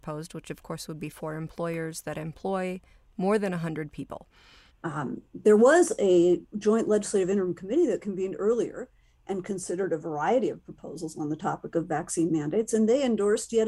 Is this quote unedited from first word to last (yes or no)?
no